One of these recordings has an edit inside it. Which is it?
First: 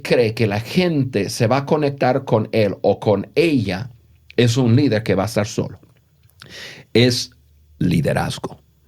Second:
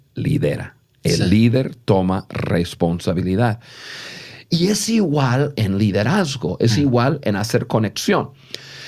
second; 2 cuts; at 4.4 s, 5.5 s

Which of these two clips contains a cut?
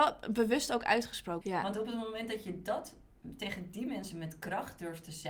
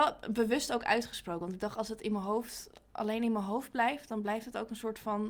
first; 1 cut; at 1.4 s

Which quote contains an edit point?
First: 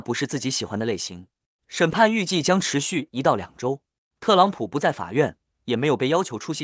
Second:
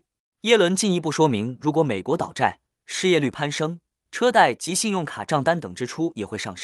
second; 1 cut; at 4.1 s

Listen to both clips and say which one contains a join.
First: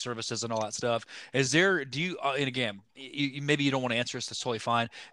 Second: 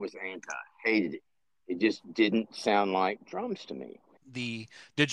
second; 1 cut; at 4.2 s

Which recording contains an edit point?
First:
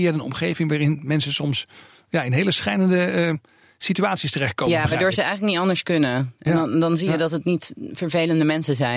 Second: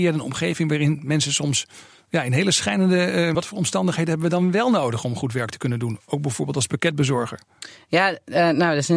second; 1 cut; at 3.3 s

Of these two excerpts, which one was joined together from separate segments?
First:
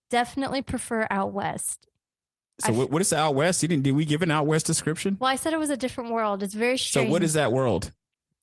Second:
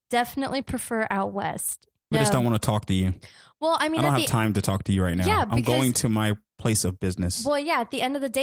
second; 1 cut; at 2.1 s

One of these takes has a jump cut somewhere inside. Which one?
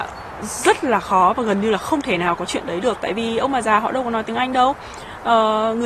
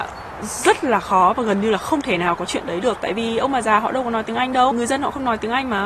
second; 1 cut; at 4.7 s

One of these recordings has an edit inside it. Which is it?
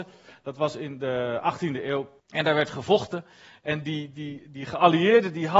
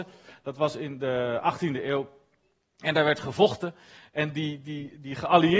first; 1 cut; at 2.2 s

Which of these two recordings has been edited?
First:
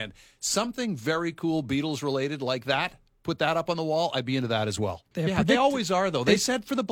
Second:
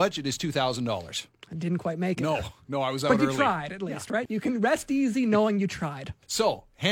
first; 1 cut; at 5.1 s

